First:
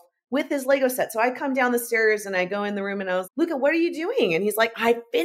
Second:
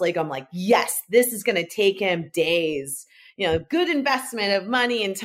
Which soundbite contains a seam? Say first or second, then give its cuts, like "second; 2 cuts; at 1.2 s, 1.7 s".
first; 1 cut; at 3.2 s